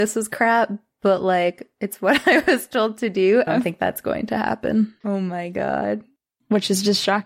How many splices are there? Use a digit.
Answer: 2